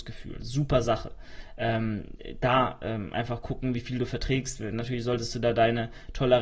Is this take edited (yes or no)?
no